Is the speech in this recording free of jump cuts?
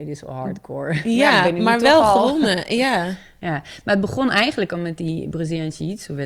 yes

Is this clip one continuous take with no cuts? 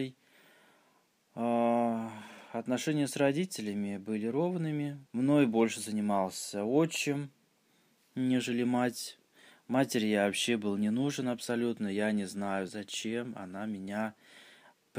no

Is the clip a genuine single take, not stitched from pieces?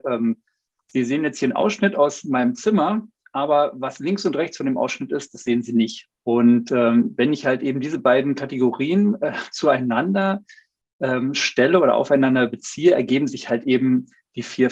no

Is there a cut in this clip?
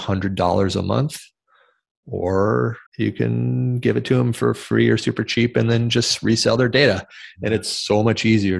yes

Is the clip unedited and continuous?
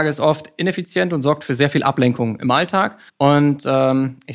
no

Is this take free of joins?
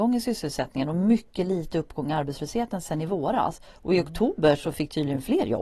yes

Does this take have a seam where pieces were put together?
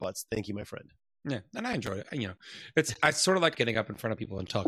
yes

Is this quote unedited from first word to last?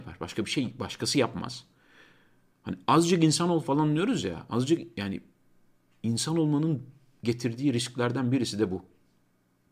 yes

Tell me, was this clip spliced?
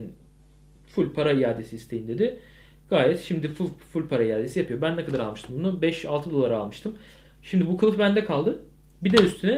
no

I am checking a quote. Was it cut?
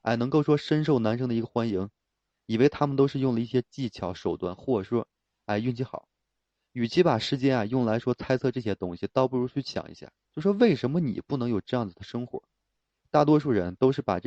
no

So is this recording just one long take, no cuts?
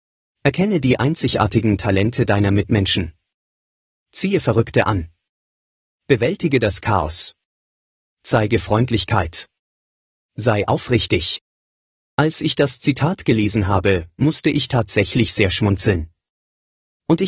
yes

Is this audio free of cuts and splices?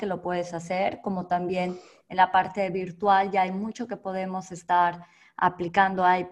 yes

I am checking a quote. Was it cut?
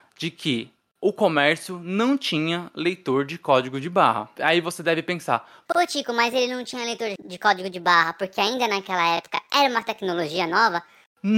no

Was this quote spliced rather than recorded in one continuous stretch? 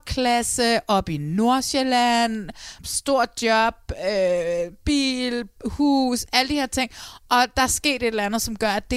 yes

